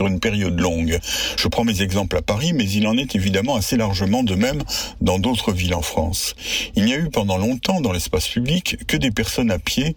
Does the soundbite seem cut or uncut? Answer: uncut